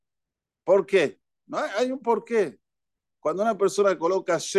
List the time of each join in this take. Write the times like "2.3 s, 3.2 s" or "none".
none